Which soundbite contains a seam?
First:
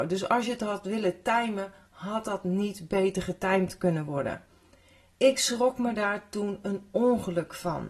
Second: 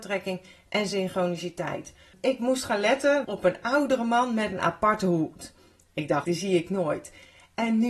second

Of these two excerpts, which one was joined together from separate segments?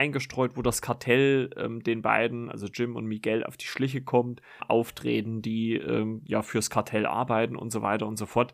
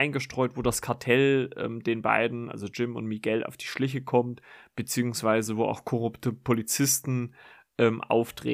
first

